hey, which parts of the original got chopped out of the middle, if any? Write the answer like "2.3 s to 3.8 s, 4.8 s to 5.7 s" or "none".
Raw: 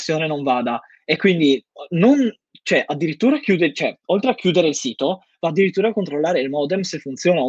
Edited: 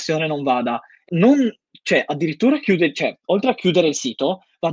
1.1 s to 1.9 s